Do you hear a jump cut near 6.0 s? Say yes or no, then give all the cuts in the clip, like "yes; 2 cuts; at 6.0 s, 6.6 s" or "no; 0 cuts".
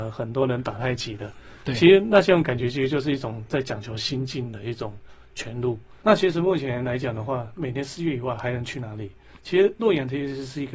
yes; 1 cut; at 6.0 s